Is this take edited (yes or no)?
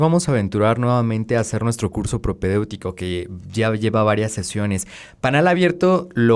no